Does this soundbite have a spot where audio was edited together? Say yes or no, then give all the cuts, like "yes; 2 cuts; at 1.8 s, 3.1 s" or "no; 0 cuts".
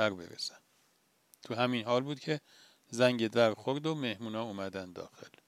no; 0 cuts